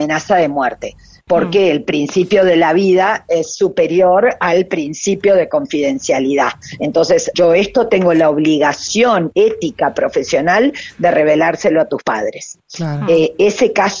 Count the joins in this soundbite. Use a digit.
1